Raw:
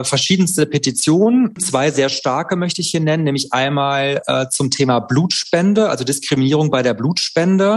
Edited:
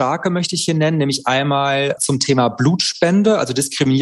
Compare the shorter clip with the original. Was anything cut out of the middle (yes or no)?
yes